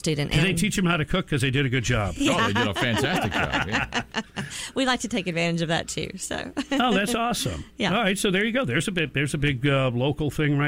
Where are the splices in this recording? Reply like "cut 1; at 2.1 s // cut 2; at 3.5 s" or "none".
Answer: none

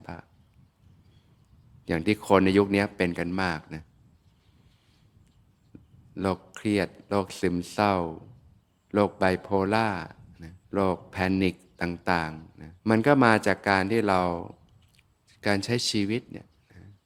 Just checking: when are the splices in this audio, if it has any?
cut 1; at 10.6 s // cut 2; at 12.8 s

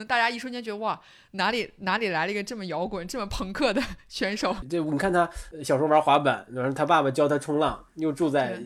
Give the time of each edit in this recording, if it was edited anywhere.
none

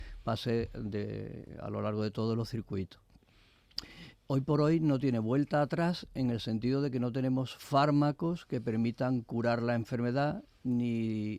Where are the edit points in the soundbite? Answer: cut 1; at 4.1 s

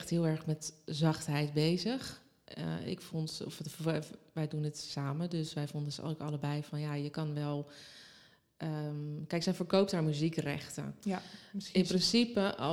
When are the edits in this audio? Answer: none

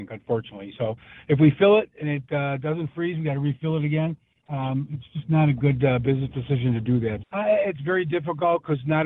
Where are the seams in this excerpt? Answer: cut 1; at 7.2 s

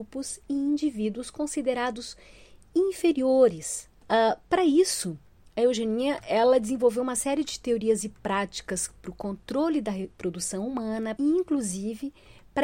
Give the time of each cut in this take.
cut 1; at 4.0 s // cut 2; at 11.2 s

